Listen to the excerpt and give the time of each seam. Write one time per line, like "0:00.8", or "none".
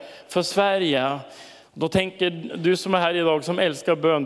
0:01.6